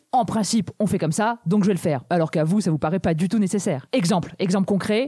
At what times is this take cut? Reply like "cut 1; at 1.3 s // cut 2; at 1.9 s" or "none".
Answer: none